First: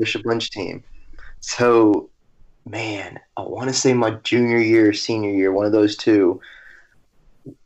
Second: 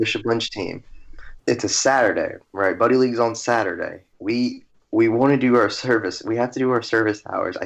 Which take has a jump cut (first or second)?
second